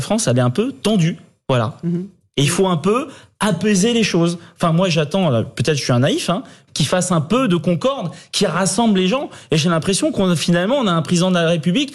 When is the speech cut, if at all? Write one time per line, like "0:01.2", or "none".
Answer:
0:06.7